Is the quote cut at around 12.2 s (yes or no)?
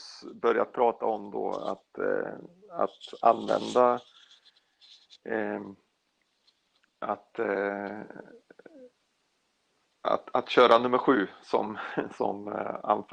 yes